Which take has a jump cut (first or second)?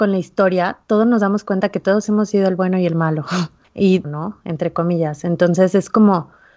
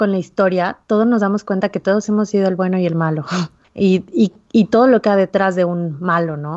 first